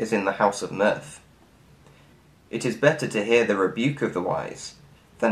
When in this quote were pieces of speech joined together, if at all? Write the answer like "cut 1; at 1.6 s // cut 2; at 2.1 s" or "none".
none